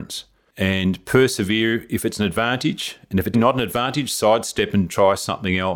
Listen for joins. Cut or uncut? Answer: cut